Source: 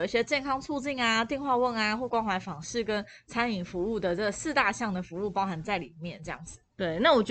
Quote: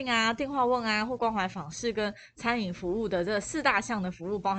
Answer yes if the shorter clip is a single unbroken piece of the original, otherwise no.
yes